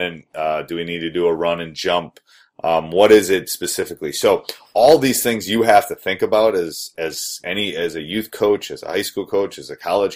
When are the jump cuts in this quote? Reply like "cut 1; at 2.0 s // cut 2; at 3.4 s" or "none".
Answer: none